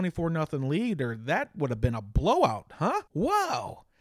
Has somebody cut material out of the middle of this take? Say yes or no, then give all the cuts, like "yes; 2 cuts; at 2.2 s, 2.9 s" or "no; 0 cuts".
yes; 1 cut; at 3.1 s